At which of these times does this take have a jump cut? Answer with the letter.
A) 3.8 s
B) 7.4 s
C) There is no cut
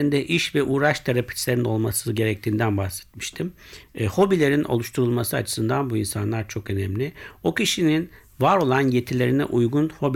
C